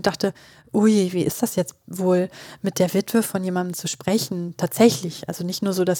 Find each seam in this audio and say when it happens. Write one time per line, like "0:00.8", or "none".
none